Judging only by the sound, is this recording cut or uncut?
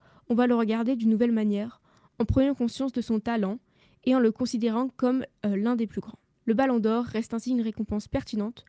uncut